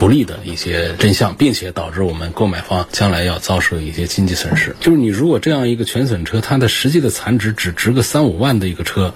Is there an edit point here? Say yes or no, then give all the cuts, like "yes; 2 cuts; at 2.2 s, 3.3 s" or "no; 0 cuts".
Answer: yes; 1 cut; at 4.7 s